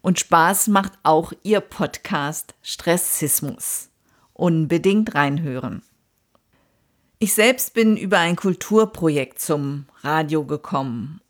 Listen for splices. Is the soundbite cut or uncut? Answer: uncut